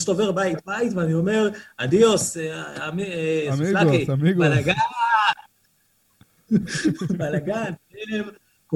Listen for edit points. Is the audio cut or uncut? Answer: uncut